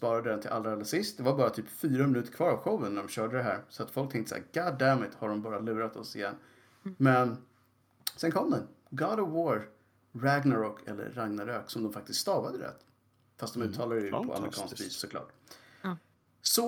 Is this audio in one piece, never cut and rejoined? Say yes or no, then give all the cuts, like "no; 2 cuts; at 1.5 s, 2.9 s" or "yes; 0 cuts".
yes; 0 cuts